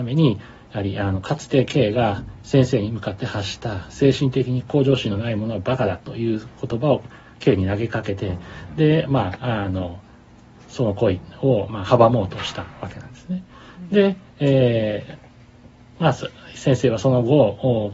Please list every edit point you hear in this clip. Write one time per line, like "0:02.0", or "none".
none